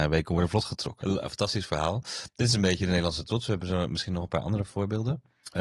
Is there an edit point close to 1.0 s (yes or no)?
yes